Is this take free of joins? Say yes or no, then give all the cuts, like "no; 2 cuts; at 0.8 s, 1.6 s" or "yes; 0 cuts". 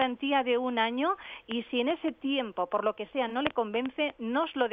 yes; 0 cuts